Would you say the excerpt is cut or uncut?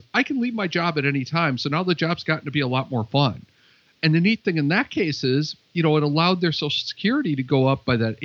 uncut